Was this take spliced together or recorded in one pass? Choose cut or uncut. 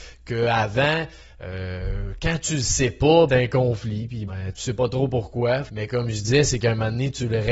cut